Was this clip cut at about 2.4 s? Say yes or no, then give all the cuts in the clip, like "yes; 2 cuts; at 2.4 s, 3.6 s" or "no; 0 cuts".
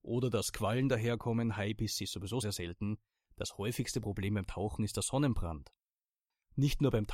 yes; 1 cut; at 2.4 s